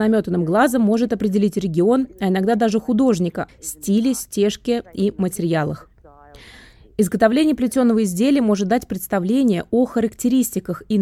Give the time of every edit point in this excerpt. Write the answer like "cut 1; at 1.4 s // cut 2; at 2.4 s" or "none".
cut 1; at 3.5 s